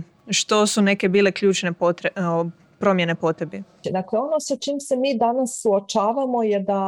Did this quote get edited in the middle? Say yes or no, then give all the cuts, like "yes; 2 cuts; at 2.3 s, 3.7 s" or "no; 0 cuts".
yes; 1 cut; at 3.8 s